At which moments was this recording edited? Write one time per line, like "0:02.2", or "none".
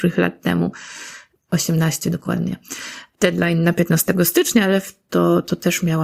0:05.1